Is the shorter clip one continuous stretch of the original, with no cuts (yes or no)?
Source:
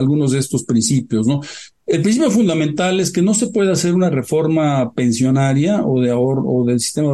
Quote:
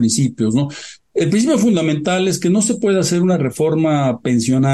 yes